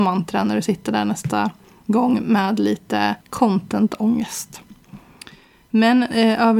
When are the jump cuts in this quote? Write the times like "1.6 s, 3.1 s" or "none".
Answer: 3.2 s